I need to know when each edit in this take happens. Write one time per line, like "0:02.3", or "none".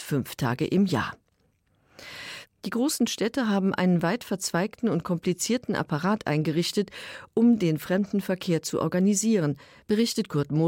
0:02.4